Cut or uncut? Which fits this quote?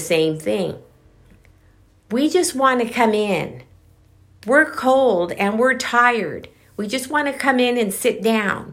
uncut